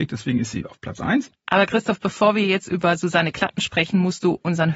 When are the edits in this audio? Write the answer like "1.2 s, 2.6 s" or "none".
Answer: 1.3 s